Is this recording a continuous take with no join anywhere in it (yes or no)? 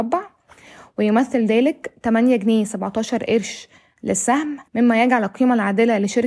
no